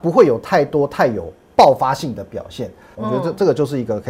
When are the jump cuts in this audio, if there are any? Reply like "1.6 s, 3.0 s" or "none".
2.9 s

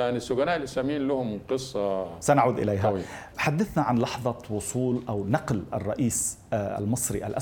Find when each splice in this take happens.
3.3 s

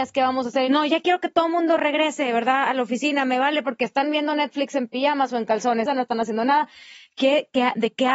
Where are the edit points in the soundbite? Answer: 5.9 s

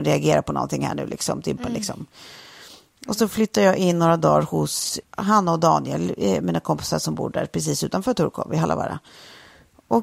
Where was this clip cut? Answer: 1.6 s, 5.0 s

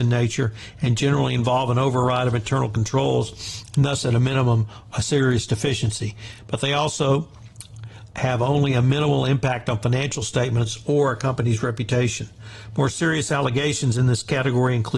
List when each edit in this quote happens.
none

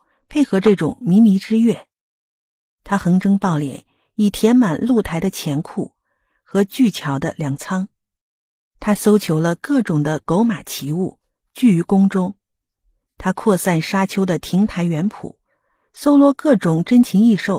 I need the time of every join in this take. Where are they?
none

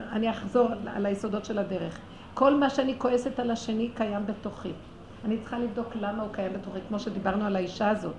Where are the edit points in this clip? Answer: none

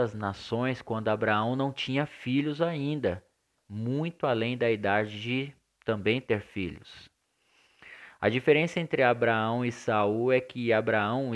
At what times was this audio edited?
3.6 s

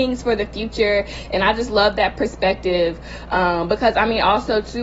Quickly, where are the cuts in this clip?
none

